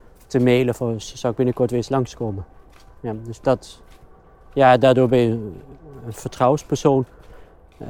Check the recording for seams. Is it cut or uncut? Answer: uncut